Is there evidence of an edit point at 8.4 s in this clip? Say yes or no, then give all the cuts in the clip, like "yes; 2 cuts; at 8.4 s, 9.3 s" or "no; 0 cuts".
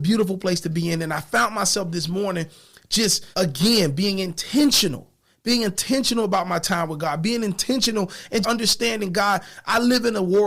yes; 2 cuts; at 3.3 s, 8.4 s